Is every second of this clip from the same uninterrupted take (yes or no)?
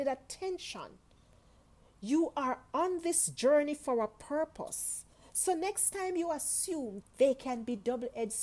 no